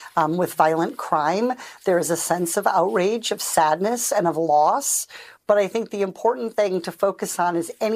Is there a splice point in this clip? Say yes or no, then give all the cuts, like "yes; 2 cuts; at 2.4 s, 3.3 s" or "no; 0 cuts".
no; 0 cuts